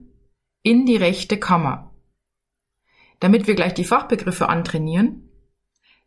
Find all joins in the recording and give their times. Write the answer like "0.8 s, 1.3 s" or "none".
none